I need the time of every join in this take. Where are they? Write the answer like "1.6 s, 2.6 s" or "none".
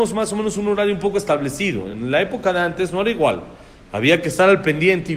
none